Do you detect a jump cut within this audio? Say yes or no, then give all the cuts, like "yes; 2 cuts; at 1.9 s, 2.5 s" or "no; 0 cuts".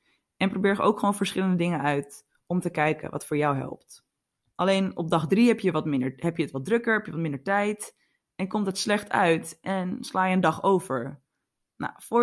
yes; 1 cut; at 4.5 s